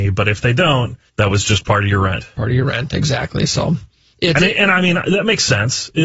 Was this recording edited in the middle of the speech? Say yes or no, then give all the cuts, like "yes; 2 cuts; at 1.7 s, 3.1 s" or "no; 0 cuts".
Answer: yes; 1 cut; at 1.1 s